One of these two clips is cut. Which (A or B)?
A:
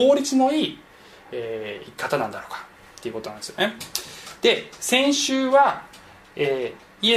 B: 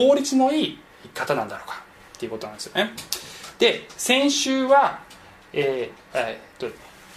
B